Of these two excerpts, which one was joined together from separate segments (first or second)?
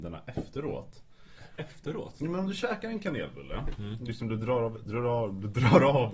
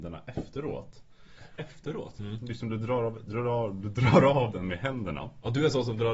second